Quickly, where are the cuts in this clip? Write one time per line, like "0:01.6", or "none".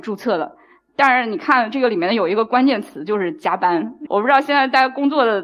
0:04.1

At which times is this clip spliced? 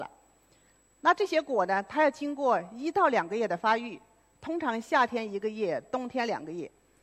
none

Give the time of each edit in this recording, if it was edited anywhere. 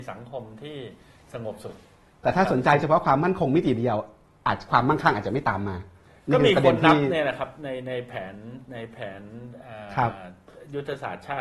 none

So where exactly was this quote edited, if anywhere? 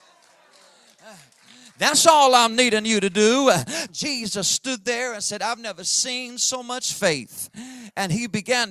0:03.9

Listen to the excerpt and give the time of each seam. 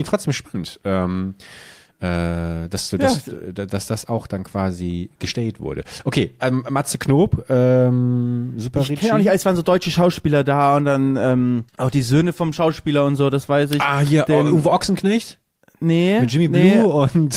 0:11.7

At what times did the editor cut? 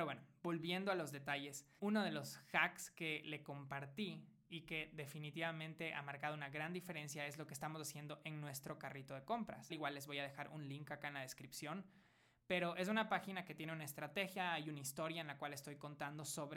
0:01.8
0:09.7

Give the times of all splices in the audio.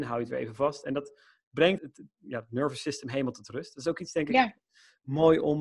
0:01.8

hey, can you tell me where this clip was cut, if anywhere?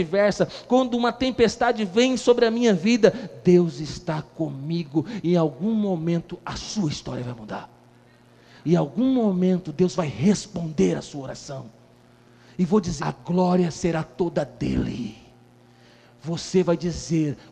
0:13.0

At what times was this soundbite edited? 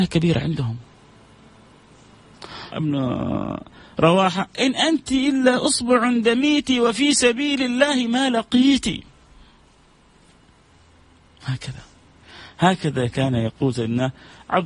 0:02.7

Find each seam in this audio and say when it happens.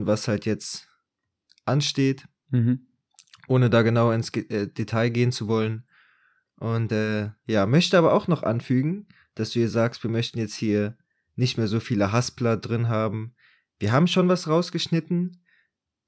none

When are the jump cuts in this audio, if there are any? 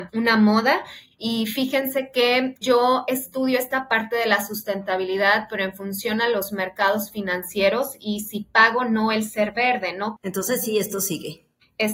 0:02.6
0:10.2

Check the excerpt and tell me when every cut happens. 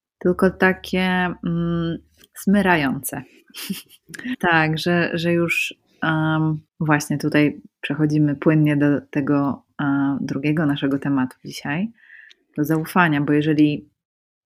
0:04.3
0:06.7

